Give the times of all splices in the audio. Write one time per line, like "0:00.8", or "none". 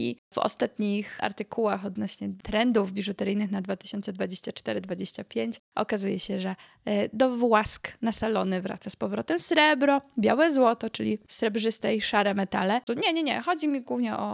0:12.9